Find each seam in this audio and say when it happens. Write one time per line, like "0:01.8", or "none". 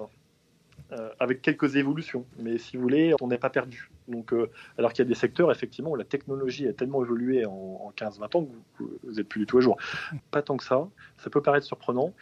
0:03.2
0:10.2